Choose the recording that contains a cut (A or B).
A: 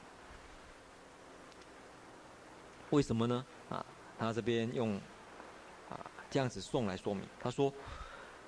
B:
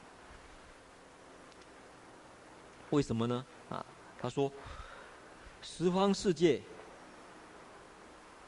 B